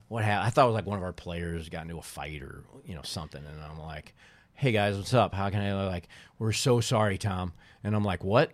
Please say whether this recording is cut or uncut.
uncut